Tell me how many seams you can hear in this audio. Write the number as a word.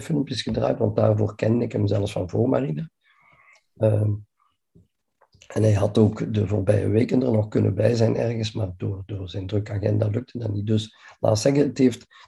zero